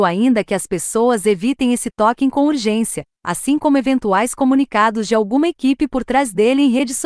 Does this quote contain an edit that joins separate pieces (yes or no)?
no